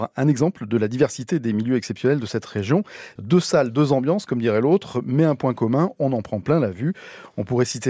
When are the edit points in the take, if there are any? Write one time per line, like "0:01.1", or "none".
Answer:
0:03.2